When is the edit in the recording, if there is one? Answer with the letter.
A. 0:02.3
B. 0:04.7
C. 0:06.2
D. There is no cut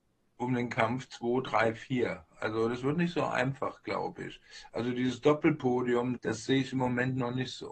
C